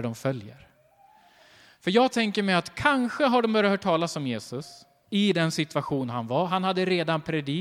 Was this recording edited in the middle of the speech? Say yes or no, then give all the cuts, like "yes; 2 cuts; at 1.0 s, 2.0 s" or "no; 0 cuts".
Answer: no; 0 cuts